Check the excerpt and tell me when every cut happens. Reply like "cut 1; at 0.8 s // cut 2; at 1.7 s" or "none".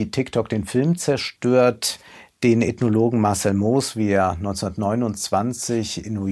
none